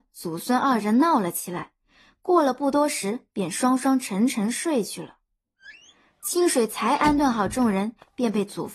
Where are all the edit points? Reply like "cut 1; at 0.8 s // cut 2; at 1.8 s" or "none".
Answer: none